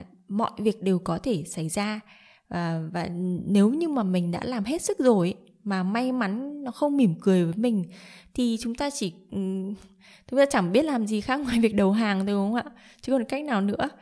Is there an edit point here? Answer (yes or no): no